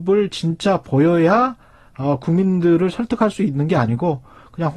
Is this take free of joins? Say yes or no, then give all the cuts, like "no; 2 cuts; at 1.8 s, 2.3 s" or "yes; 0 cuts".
yes; 0 cuts